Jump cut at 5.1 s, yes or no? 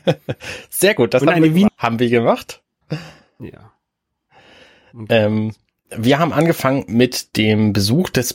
no